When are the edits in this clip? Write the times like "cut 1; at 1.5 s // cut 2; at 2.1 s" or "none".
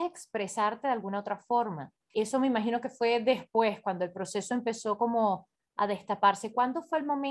cut 1; at 2.1 s

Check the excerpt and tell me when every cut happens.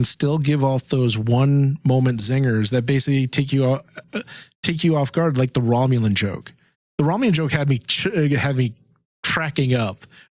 none

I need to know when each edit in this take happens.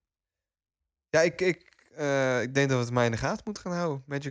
none

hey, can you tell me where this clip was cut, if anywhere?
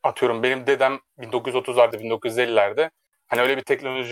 cut 1; at 1.9 s

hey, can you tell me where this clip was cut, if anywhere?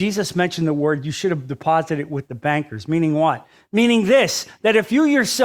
none

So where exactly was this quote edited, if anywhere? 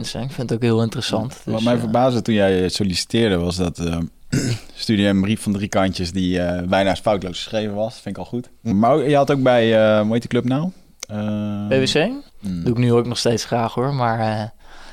cut 1; at 8.7 s // cut 2; at 12.3 s

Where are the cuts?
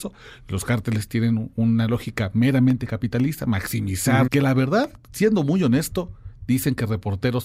cut 1; at 4.3 s

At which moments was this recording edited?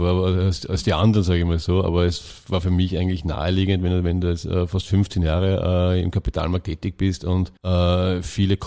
cut 1; at 7.6 s

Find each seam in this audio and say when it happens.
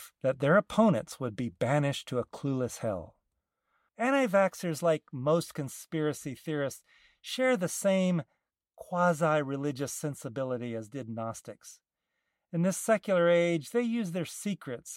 cut 1; at 3.9 s

